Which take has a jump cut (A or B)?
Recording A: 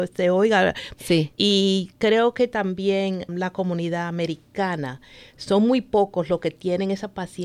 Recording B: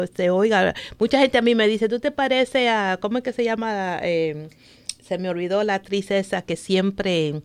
A